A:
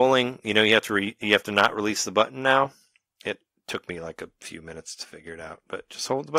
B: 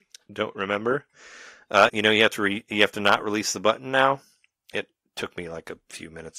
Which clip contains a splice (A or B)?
B